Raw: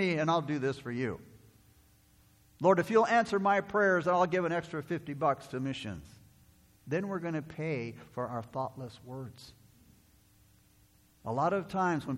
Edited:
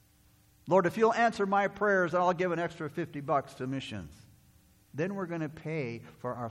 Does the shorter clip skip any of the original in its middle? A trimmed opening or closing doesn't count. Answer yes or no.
no